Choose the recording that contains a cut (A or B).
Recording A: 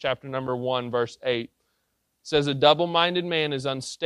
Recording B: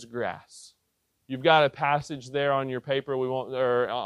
B